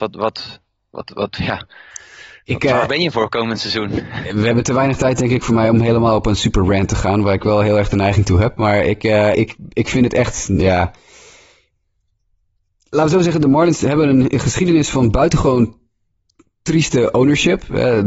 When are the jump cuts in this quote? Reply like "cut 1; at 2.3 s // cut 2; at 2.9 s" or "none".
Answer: cut 1; at 9.3 s